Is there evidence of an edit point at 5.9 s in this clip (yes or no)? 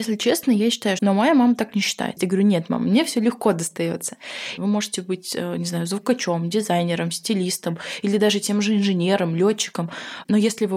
no